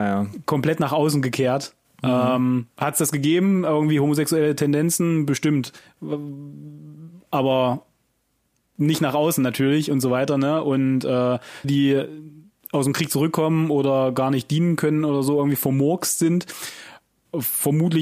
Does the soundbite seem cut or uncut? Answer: cut